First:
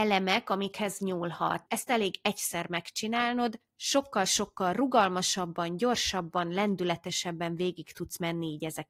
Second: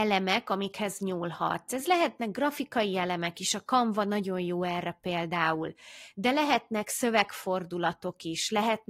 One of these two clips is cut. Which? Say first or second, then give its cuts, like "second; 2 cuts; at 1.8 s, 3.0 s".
first; 1 cut; at 1.7 s